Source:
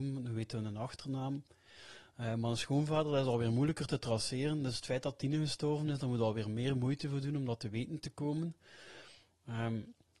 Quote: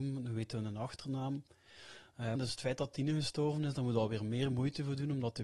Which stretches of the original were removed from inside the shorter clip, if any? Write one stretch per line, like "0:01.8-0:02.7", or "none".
0:02.4-0:04.6